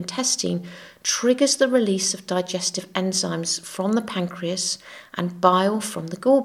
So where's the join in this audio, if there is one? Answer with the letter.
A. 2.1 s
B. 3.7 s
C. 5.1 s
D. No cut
D